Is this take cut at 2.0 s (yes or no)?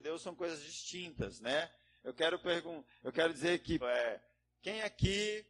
no